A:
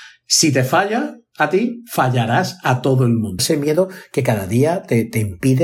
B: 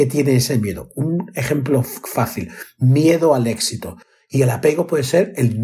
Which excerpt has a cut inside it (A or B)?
A